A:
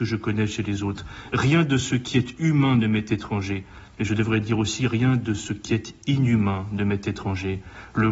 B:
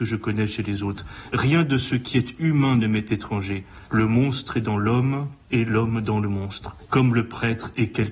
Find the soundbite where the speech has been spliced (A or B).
B